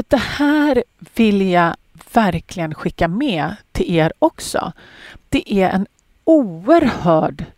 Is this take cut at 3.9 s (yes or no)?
no